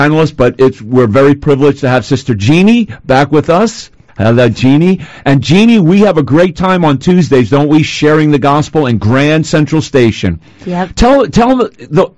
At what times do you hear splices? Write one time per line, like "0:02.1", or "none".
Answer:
0:04.1